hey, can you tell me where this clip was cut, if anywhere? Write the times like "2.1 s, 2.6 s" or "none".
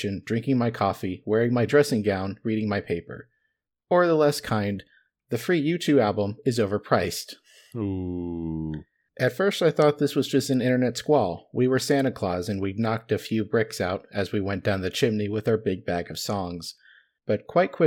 none